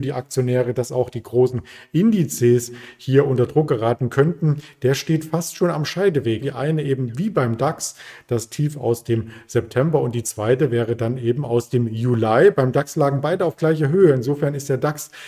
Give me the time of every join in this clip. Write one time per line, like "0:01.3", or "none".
0:06.4